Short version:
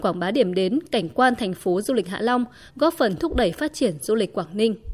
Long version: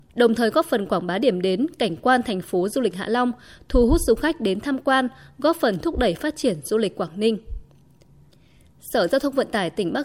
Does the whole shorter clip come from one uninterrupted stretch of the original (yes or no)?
no